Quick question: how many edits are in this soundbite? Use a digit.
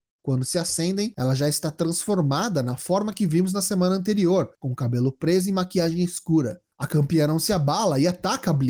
0